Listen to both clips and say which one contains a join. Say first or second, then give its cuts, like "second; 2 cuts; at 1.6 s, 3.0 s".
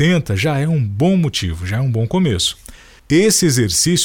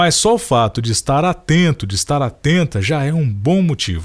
first; 1 cut; at 3.0 s